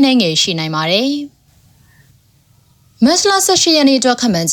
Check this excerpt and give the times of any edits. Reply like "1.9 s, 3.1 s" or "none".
none